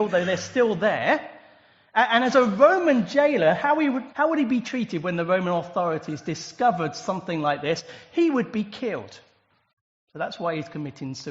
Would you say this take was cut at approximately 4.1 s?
yes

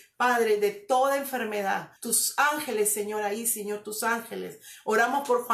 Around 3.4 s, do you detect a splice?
no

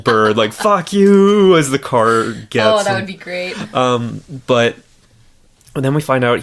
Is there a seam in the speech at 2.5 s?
no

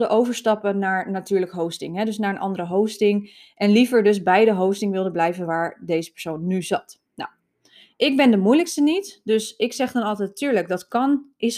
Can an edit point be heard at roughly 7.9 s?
no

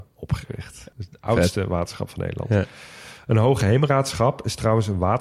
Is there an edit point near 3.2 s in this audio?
no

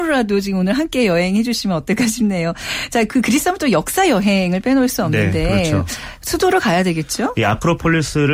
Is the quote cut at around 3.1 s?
no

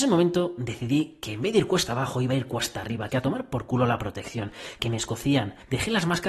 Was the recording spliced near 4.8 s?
yes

